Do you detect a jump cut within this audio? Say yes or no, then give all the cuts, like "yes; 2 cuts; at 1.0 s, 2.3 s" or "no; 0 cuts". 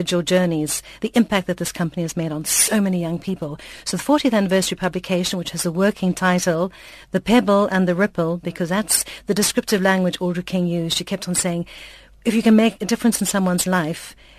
no; 0 cuts